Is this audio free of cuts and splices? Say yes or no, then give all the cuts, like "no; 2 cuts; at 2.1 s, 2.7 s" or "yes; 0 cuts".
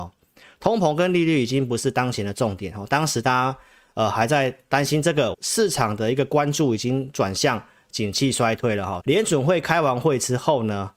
no; 2 cuts; at 5.3 s, 9.0 s